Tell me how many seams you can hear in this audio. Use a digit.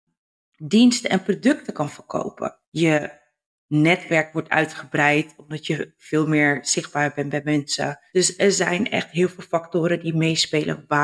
1